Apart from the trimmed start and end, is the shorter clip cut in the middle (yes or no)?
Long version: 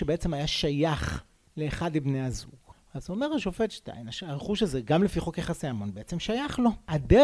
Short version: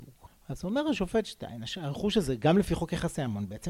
no